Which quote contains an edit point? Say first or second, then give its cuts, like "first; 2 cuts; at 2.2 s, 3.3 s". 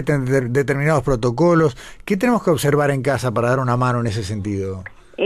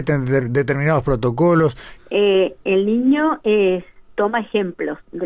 second; 1 cut; at 2.0 s